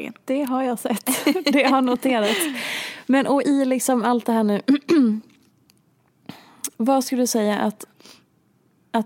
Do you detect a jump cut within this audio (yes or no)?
no